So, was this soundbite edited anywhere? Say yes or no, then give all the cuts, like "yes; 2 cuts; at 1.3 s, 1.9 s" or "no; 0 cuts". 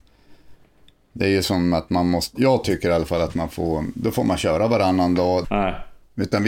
yes; 2 cuts; at 2.4 s, 5.4 s